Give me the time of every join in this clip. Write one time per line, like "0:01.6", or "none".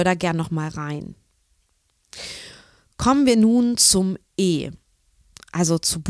none